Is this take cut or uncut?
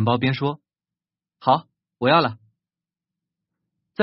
uncut